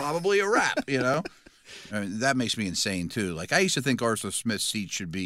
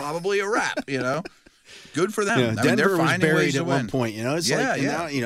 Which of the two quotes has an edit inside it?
first; 1 cut; at 1.9 s

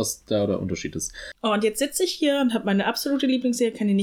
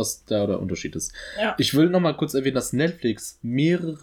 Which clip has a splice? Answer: first; 1 cut; at 1.3 s

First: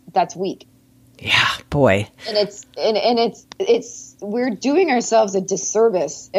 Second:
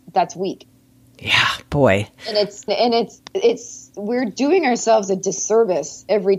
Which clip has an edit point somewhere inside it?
second; 1 cut; at 2.7 s

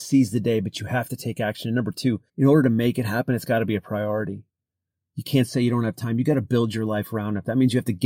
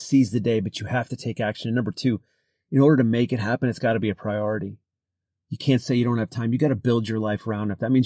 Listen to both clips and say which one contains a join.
first; 1 cut; at 2.3 s

